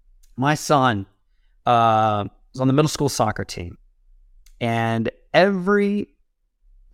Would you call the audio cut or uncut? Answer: uncut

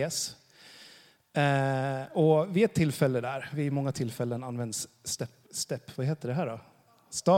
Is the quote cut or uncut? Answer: cut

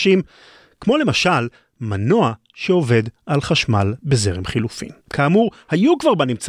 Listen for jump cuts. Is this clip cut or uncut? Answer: cut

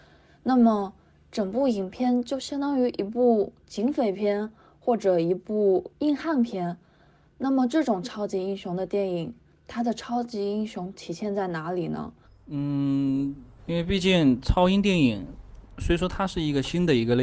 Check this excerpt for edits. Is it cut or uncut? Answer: cut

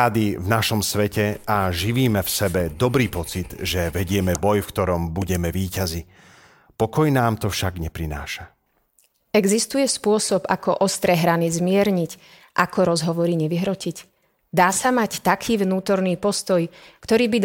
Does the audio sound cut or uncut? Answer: uncut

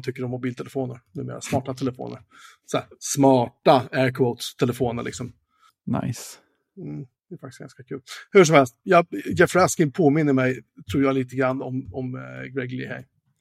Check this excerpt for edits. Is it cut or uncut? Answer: cut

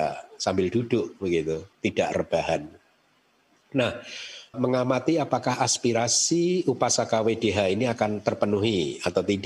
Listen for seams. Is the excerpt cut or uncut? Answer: cut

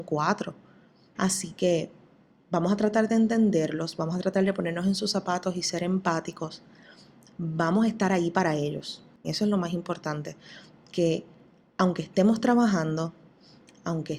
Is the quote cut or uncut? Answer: cut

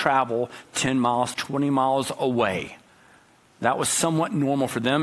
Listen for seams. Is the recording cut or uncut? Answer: cut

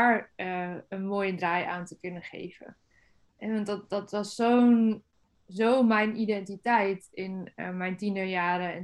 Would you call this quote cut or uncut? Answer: uncut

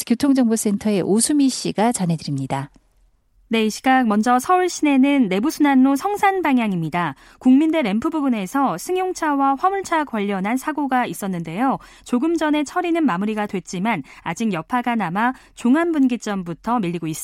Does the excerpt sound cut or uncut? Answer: uncut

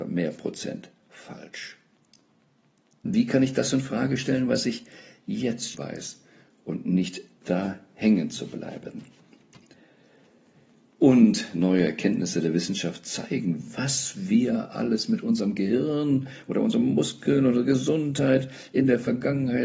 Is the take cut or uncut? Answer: cut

